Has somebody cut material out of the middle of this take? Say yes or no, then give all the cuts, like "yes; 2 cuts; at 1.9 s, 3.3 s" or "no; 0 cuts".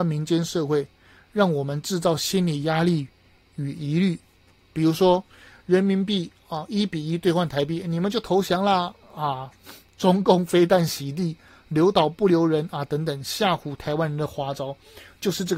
no; 0 cuts